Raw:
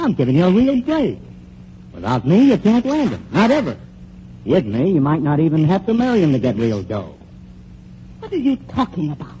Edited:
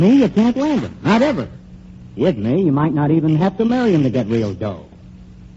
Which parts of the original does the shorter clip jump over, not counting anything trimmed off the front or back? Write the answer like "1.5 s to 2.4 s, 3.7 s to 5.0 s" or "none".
none